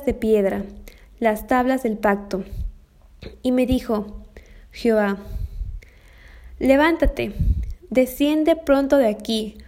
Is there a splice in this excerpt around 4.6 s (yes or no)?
no